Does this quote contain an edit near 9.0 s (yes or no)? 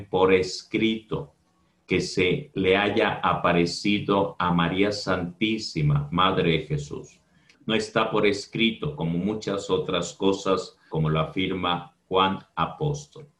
no